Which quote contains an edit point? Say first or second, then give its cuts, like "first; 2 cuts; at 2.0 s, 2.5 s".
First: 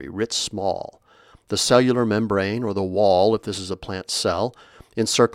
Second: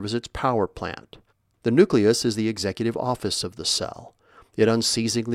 second; 1 cut; at 1.5 s